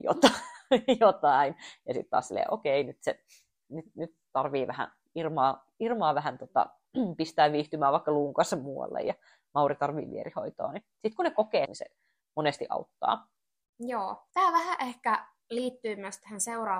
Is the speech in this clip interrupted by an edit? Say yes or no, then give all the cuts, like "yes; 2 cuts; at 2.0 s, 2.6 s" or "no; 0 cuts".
yes; 2 cuts; at 11.6 s, 14.3 s